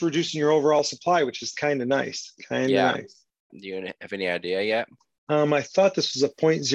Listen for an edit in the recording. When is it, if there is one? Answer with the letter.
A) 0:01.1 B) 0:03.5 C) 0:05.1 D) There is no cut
B